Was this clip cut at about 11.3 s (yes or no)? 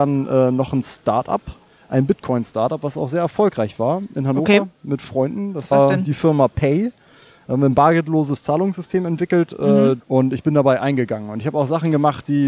no